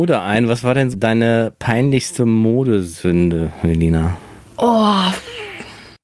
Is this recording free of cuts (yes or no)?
no